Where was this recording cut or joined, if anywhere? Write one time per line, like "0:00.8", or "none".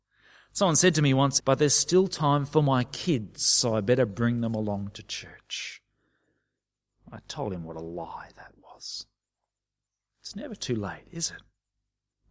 0:01.4